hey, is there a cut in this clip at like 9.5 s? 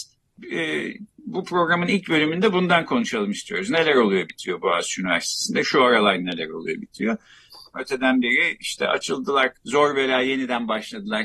yes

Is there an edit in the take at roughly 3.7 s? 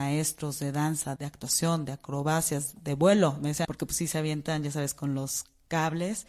yes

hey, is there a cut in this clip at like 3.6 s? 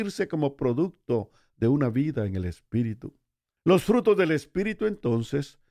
yes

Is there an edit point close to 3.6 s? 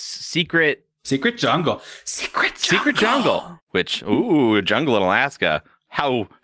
yes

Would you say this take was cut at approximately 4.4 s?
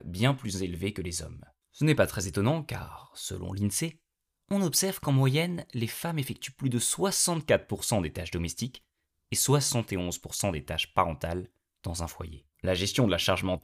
no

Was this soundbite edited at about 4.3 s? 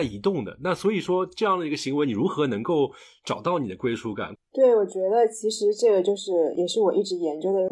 yes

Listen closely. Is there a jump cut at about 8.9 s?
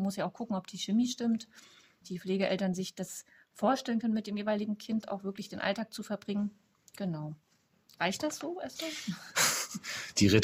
no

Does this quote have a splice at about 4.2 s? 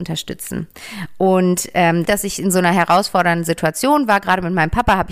no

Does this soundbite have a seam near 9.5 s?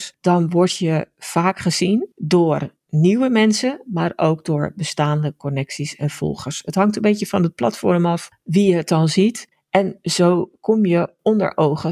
yes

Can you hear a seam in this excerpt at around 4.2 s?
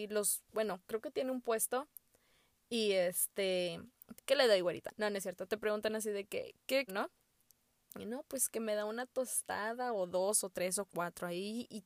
yes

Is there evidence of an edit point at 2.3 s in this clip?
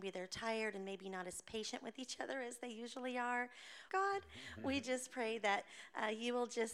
no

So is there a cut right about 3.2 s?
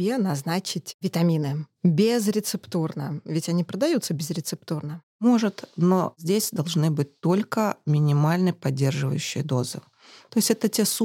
no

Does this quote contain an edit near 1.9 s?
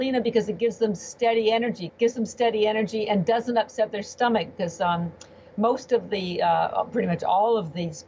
yes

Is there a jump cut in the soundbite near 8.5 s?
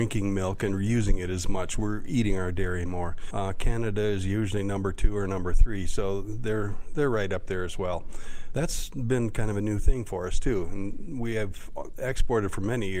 yes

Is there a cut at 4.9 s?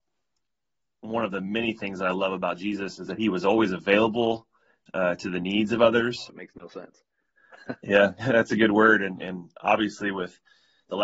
no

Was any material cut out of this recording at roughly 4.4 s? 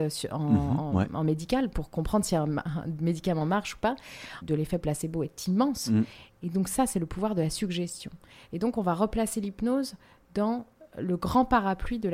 yes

